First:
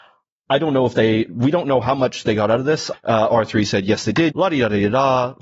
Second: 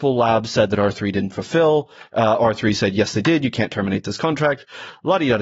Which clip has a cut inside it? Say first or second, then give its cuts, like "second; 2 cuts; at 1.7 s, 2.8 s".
first; 2 cuts; at 2.9 s, 4.3 s